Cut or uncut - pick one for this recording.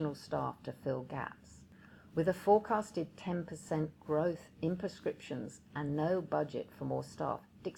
uncut